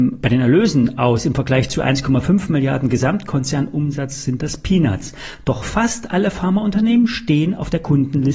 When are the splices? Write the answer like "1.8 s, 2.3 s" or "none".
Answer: none